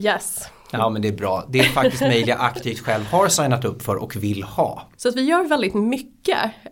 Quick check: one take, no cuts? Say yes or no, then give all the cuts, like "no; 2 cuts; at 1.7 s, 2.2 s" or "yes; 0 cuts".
no; 1 cut; at 5.0 s